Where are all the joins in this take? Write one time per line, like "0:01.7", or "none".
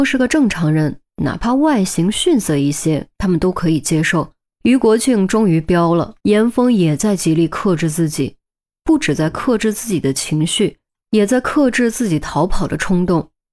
0:04.5
0:06.2

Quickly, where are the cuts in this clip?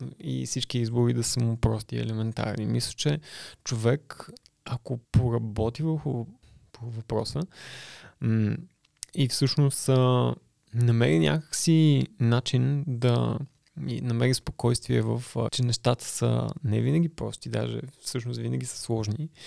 0:05.0
0:15.5

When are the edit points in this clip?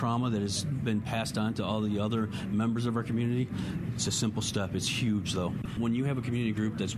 none

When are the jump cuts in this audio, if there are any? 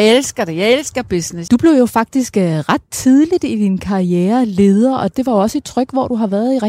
0:01.5
0:05.1

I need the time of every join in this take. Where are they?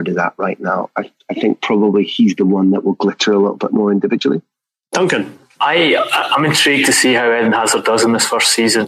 none

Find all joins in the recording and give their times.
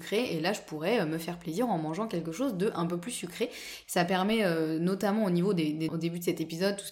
0:03.8
0:05.9

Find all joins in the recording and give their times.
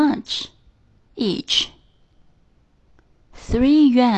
0:01.1

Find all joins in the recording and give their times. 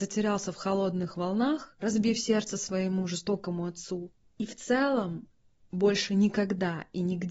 none

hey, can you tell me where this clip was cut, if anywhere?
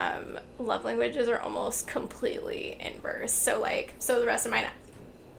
0:04.0

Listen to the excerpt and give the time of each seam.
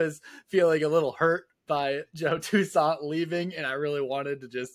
none

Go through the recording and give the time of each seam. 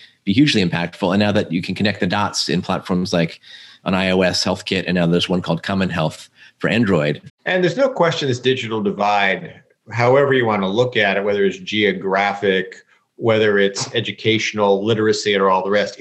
0:07.3

